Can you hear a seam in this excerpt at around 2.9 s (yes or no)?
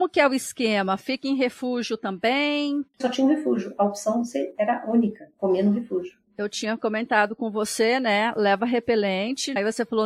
yes